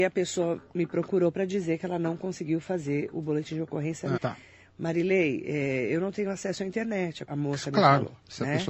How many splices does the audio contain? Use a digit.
2